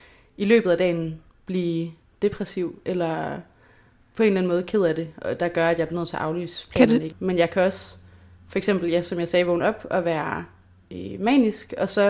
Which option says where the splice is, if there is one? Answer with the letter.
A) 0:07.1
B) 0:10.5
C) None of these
A